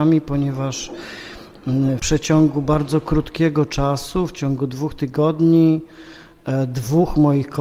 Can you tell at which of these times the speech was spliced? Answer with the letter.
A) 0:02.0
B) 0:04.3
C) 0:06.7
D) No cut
A